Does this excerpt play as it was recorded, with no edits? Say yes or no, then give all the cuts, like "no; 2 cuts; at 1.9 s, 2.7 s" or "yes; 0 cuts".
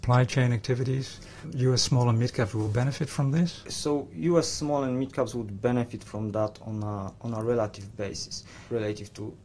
yes; 0 cuts